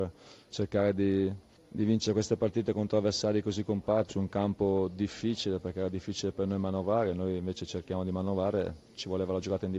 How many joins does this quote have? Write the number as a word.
one